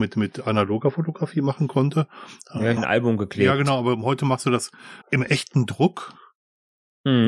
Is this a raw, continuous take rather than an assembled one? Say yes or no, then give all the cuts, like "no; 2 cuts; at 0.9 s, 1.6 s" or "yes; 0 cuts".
no; 2 cuts; at 2.8 s, 5.0 s